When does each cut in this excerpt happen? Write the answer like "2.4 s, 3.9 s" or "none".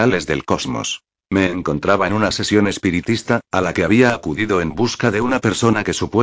1.2 s